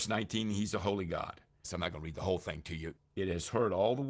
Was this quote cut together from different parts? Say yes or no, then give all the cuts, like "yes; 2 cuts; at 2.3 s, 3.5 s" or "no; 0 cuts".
yes; 2 cuts; at 1.6 s, 3.0 s